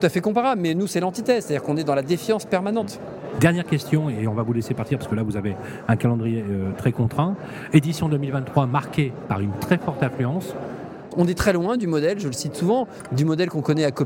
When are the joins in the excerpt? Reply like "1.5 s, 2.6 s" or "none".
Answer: 11.1 s